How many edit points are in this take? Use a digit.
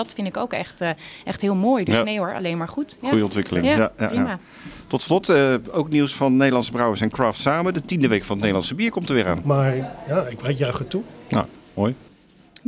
1